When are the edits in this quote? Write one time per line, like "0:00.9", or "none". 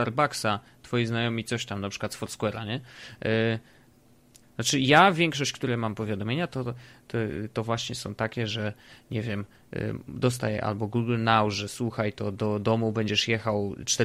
0:04.4